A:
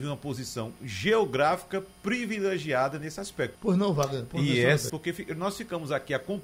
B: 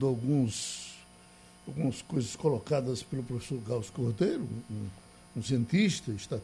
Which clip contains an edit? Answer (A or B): A